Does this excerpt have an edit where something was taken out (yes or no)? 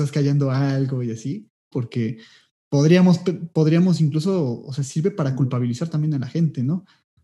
yes